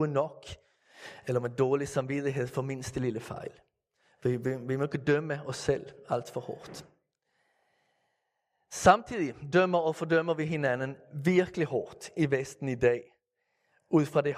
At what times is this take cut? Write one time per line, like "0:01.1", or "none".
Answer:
none